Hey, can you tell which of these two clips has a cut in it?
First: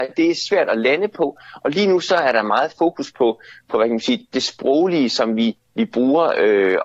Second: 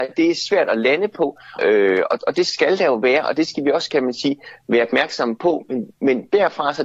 second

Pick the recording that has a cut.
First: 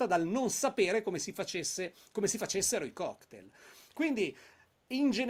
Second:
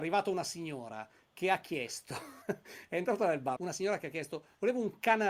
second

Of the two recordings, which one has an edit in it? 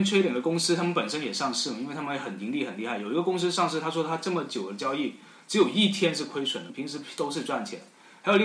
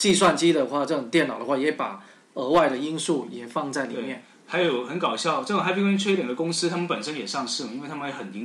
first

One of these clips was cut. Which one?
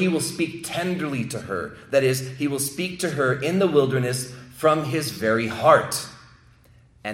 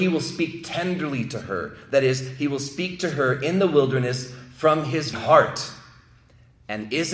second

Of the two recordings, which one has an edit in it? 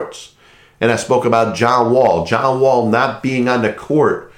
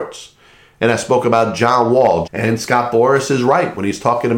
second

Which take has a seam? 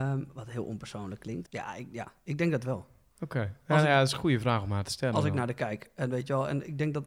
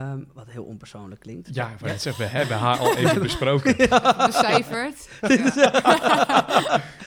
first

